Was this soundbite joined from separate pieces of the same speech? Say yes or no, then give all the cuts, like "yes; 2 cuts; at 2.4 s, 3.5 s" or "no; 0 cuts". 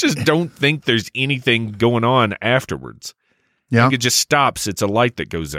no; 0 cuts